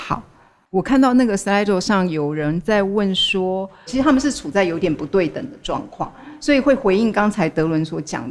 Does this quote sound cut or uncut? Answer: cut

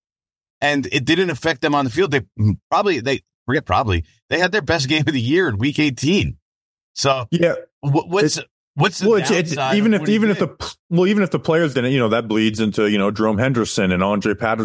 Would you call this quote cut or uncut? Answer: uncut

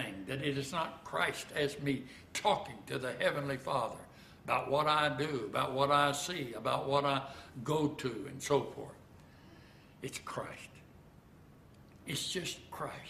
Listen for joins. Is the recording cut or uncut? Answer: uncut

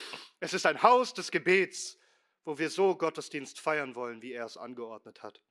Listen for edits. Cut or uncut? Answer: uncut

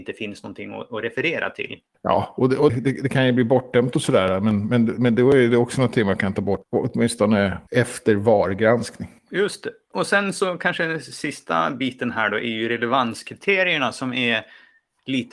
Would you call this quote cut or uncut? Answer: cut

